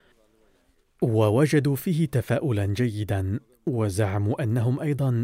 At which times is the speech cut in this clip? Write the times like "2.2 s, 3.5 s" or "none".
none